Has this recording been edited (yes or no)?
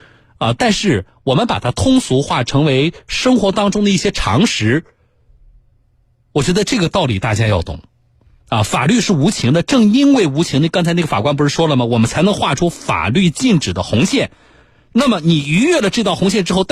no